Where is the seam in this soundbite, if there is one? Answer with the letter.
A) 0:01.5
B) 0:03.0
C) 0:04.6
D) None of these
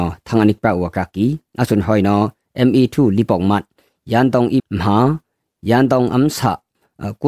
C